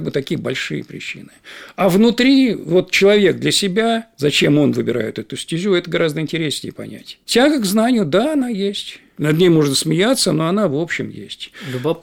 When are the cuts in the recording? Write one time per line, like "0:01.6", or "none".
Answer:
none